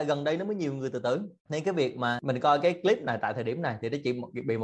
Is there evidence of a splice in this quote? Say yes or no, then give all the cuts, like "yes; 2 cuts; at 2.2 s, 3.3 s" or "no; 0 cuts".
no; 0 cuts